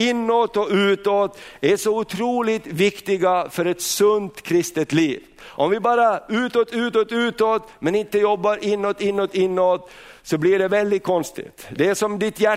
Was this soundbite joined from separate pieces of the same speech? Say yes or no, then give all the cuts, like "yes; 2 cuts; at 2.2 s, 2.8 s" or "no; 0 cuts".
no; 0 cuts